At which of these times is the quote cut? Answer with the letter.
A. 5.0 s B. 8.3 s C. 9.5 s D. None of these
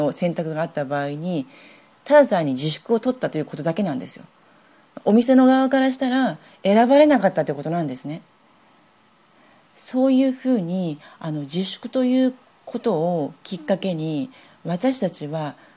D